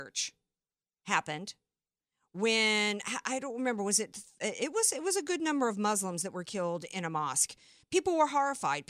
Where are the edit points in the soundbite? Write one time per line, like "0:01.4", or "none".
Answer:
none